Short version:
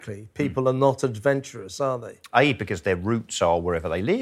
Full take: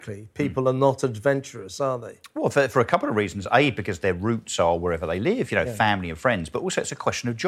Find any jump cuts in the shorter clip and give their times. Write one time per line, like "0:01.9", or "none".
0:02.3